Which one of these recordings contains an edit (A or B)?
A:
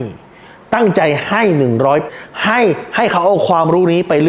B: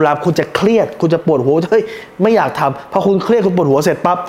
A